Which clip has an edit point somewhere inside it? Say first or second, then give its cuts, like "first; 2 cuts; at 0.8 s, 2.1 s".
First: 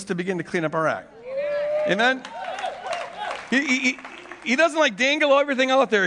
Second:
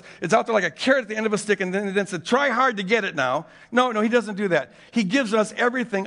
first; 1 cut; at 3.5 s